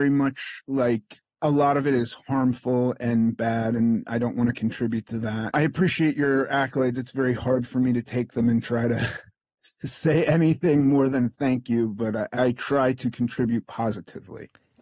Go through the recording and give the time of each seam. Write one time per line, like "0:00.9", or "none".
0:05.5